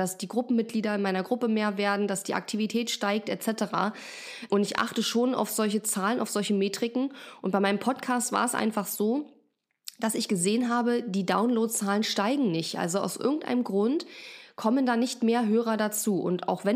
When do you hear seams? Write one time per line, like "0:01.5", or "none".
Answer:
none